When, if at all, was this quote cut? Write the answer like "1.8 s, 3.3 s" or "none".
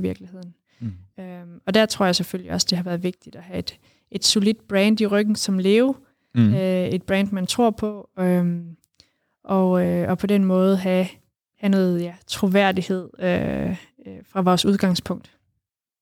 none